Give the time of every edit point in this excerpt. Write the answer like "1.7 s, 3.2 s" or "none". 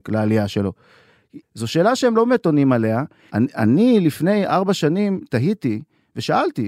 1.4 s, 3.3 s